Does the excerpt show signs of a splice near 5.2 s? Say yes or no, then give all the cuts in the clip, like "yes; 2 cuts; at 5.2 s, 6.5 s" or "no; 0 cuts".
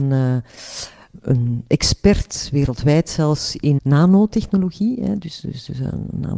no; 1 cut; at 3.8 s